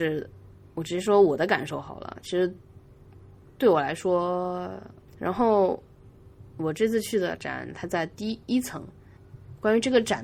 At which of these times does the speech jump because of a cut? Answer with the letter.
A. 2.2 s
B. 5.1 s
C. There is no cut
B